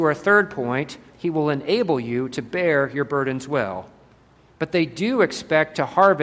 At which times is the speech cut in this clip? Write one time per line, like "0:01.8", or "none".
0:01.1
0:04.5